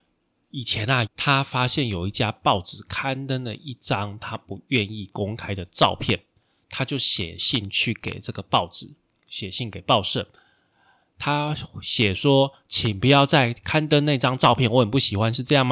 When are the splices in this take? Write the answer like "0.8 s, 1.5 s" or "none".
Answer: 1.1 s